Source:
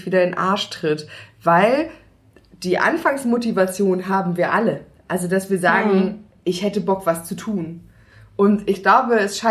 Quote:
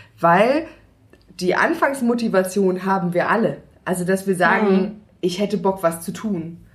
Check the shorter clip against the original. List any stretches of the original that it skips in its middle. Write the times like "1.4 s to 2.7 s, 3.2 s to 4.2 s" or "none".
none